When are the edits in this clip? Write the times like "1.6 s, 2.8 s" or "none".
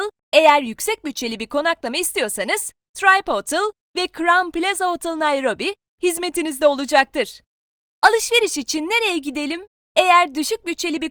9.8 s